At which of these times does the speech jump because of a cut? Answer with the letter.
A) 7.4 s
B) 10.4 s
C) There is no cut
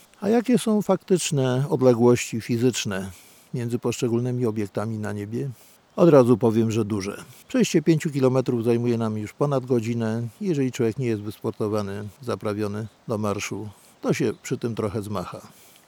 A